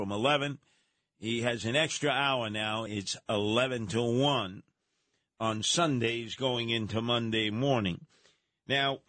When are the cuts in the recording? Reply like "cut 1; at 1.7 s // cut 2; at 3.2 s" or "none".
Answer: none